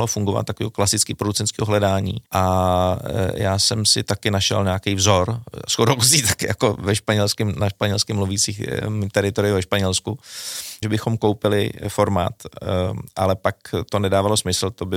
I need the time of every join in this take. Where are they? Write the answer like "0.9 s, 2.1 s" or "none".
2.3 s, 10.8 s